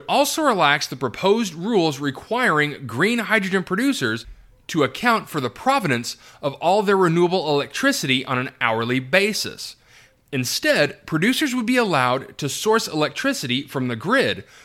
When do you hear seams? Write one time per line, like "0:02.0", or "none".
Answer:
none